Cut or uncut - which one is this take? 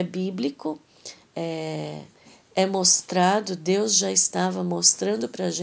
uncut